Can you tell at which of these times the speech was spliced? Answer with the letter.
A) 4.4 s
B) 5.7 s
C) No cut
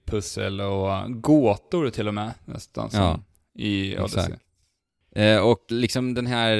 B